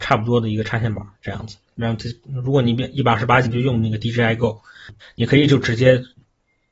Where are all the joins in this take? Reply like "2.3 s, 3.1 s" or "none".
1.7 s, 3.4 s, 5.0 s

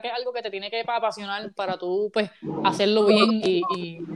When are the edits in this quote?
none

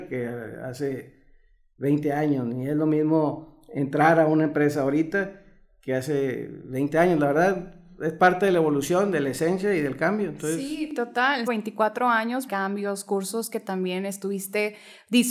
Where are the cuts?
11.5 s, 12.5 s

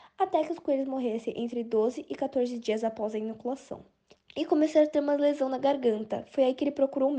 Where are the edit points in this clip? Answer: 4.1 s

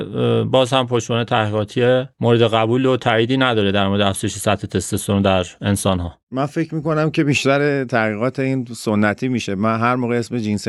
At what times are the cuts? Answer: 2.1 s

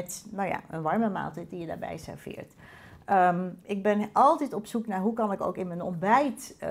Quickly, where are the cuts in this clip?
3.6 s

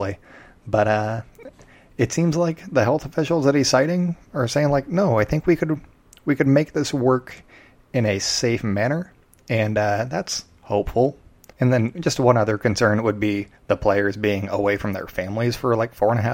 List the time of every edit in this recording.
11.5 s, 13.6 s

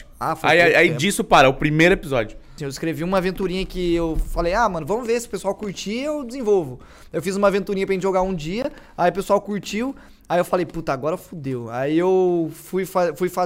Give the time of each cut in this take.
2.6 s

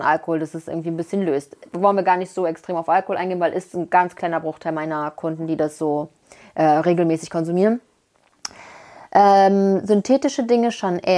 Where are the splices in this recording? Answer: none

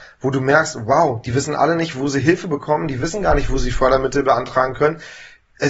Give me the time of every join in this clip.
none

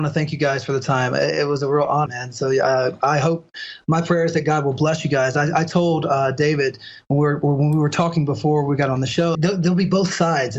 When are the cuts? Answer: 2.1 s, 9.3 s

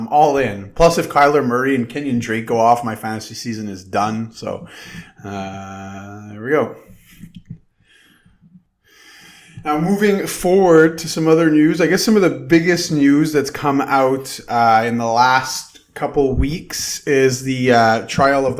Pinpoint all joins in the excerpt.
none

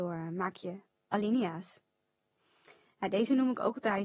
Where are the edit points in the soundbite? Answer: none

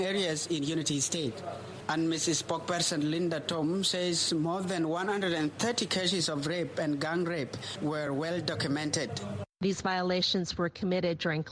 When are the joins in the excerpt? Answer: none

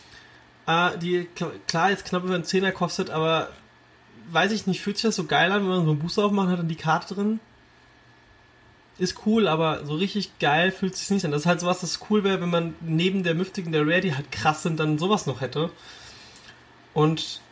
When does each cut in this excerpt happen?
none

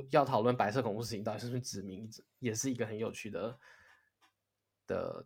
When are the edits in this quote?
none

